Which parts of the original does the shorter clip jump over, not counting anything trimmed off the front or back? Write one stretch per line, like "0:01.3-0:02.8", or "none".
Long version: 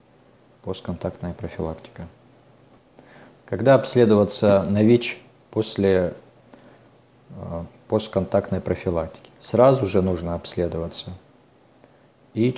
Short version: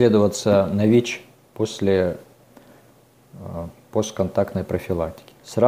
none